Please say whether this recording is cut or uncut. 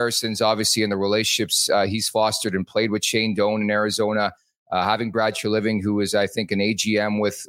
uncut